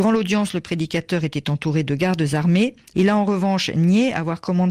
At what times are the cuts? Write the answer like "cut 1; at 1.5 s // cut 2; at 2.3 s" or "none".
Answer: cut 1; at 2.9 s